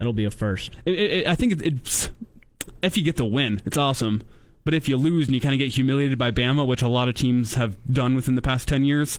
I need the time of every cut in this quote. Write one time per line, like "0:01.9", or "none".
none